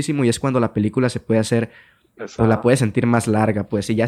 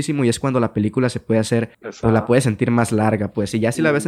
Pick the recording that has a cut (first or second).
second